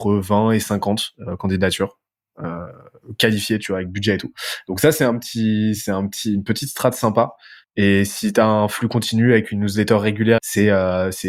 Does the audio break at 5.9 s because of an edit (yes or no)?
no